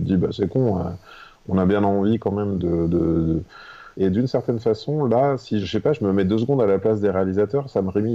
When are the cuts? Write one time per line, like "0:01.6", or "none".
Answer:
0:03.9
0:05.6